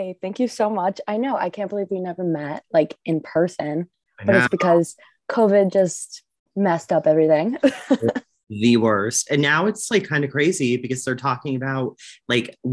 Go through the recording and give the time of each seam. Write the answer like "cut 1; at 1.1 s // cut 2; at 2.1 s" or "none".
none